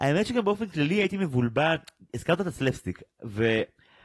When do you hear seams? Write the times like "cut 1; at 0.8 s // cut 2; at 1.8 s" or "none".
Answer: none

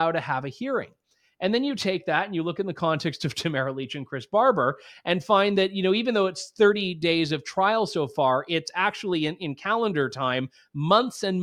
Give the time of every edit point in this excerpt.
none

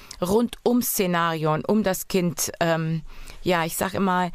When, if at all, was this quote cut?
none

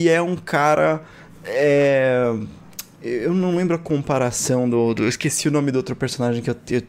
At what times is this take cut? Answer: none

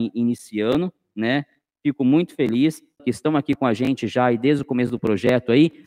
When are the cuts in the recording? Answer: cut 1; at 3.0 s

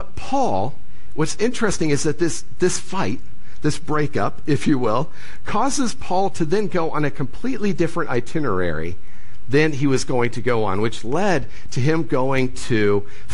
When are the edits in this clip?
none

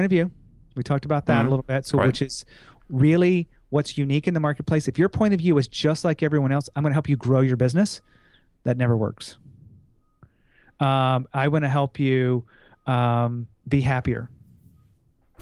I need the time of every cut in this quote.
cut 1; at 13.5 s

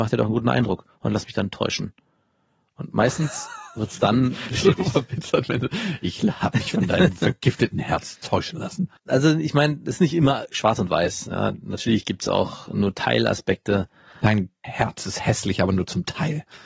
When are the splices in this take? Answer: cut 1; at 9.0 s

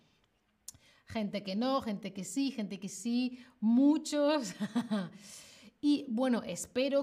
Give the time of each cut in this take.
none

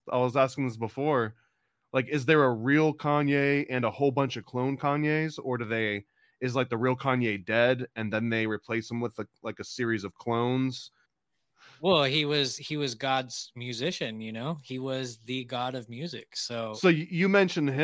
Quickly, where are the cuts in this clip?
cut 1; at 11.0 s

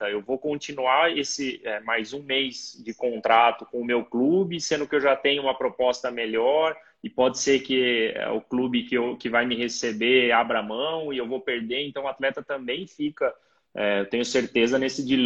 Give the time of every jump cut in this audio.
none

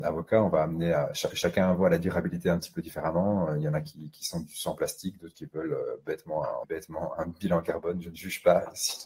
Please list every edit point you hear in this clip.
cut 1; at 6.6 s

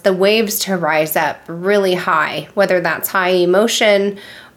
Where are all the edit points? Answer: none

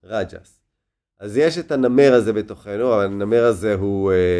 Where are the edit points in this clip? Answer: cut 1; at 1.1 s

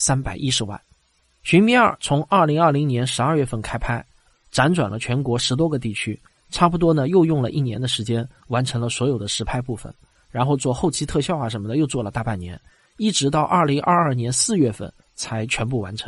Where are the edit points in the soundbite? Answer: none

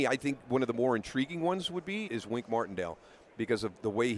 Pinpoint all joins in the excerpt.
cut 1; at 2.1 s

